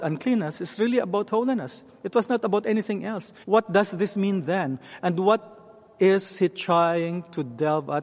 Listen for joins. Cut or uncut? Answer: cut